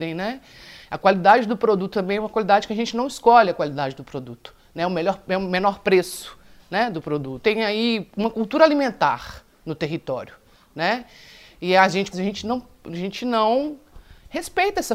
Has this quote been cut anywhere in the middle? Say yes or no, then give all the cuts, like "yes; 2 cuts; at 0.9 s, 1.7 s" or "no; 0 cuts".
yes; 2 cuts; at 7.4 s, 12.1 s